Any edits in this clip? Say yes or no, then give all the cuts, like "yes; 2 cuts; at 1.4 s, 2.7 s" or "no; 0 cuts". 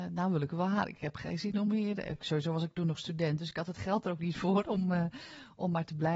no; 0 cuts